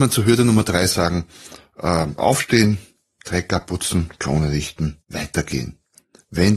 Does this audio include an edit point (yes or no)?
yes